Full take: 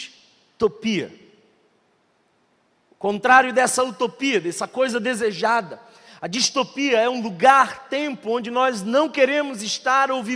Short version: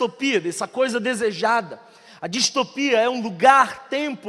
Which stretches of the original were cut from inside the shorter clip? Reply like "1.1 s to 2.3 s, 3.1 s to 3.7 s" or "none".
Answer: none